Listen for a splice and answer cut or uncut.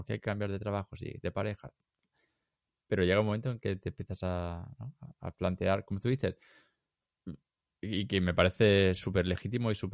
uncut